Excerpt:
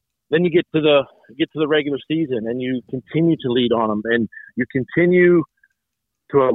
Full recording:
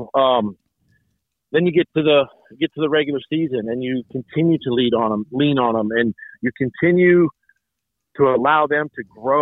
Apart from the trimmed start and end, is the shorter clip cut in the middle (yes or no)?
yes